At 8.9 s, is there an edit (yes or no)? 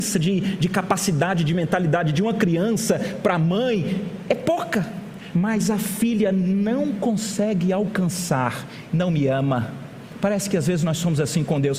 yes